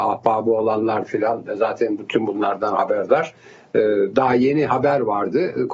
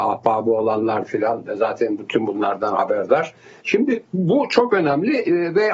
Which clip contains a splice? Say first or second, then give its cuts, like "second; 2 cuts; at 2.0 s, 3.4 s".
second; 1 cut; at 3.6 s